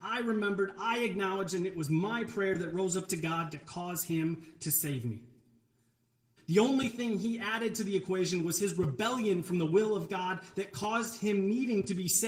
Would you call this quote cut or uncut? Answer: cut